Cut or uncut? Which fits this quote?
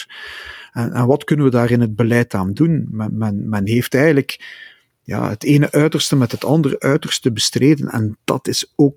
uncut